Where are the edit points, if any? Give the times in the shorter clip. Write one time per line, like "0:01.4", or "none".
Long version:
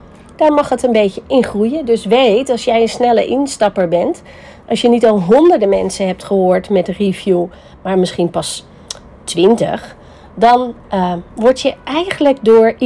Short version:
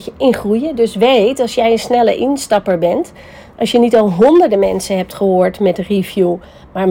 none